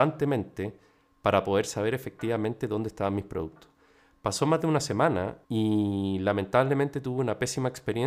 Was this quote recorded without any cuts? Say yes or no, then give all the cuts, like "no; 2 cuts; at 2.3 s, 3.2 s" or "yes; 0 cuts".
no; 1 cut; at 5.4 s